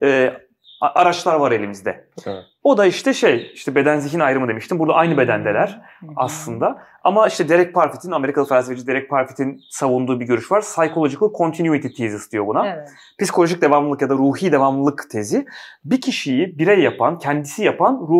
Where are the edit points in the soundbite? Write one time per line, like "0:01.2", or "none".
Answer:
none